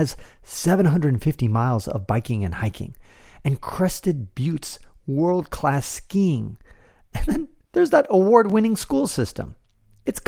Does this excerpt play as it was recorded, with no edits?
yes; 0 cuts

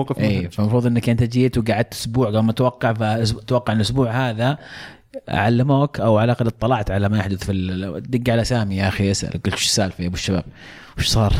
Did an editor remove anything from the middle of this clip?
no; 0 cuts

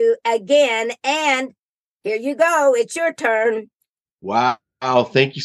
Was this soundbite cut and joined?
no; 0 cuts

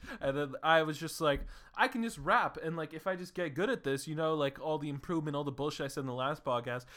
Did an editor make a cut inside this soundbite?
no; 0 cuts

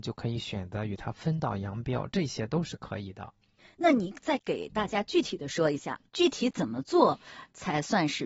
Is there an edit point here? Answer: no; 0 cuts

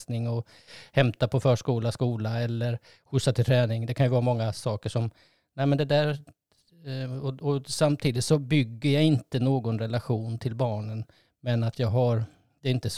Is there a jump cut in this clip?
no; 0 cuts

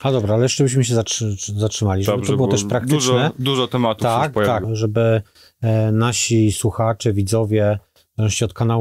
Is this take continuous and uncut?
no; 1 cut; at 4.6 s

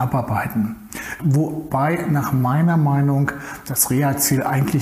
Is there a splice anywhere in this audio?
yes; 1 cut; at 1.2 s

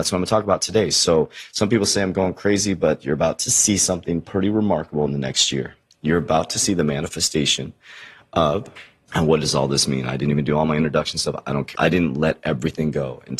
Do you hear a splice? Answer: yes; 2 cuts; at 9.1 s, 11.7 s

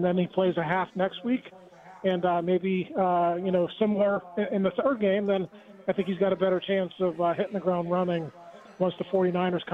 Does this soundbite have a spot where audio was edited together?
no; 0 cuts

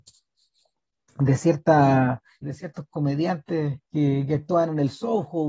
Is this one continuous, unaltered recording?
no; 2 cuts; at 2.4 s, 3.9 s

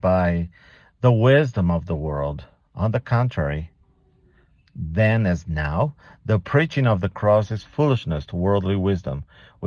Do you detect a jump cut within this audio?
no; 0 cuts

